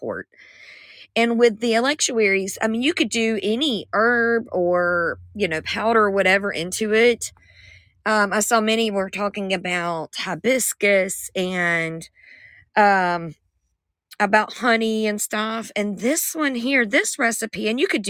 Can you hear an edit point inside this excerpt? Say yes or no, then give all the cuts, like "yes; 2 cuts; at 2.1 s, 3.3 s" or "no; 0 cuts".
no; 0 cuts